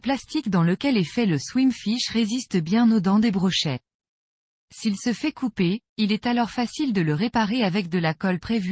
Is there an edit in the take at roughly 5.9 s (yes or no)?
yes